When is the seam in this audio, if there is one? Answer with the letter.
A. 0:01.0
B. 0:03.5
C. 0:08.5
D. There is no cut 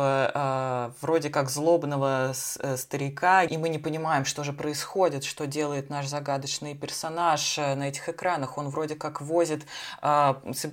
B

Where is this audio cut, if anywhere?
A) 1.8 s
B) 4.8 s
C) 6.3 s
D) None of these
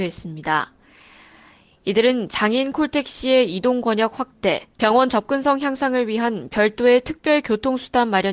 B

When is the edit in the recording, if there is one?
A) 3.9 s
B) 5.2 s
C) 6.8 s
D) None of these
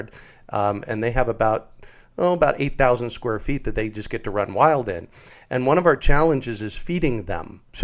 D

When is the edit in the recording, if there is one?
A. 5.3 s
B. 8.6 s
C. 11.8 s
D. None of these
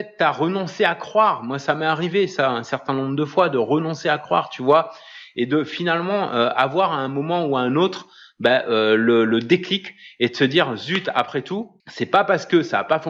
C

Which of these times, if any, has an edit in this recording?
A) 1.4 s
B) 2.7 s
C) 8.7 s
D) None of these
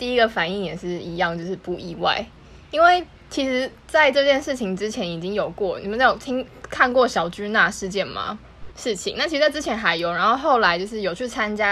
C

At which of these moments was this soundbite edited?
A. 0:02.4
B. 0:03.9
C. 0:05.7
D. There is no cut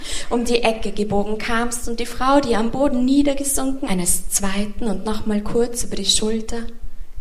B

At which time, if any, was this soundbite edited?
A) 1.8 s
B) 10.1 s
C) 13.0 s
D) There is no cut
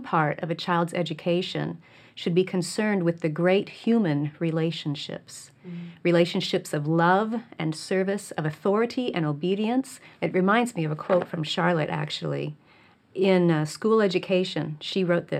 B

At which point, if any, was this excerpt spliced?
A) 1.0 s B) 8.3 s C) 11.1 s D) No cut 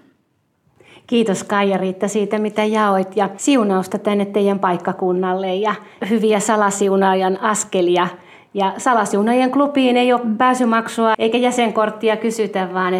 C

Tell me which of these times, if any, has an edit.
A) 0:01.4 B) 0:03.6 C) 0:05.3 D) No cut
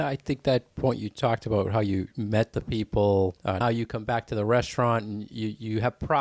B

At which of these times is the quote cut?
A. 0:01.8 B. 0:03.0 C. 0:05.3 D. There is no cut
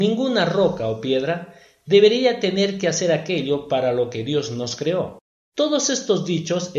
C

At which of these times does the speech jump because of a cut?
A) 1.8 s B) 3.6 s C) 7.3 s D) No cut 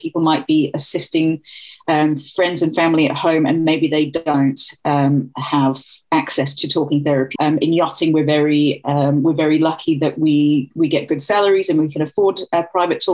C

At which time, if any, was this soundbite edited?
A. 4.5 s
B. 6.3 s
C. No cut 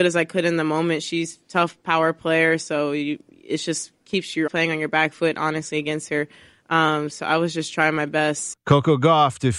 A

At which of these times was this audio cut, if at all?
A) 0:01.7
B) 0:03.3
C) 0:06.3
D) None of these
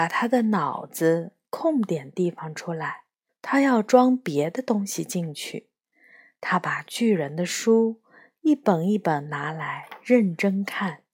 B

